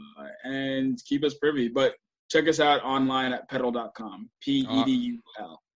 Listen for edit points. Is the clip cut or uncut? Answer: uncut